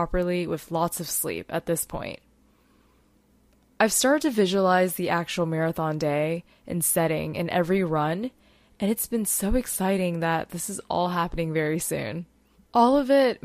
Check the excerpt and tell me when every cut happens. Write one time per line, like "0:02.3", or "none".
0:12.5